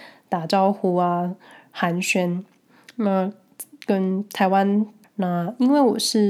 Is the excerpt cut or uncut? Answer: cut